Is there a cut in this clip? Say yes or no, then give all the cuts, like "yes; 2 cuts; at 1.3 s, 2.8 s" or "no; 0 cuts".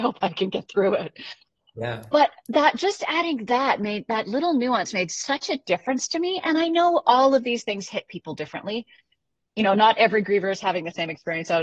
no; 0 cuts